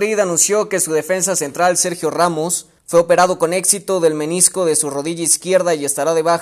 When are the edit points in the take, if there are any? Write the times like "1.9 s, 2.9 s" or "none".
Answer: 2.8 s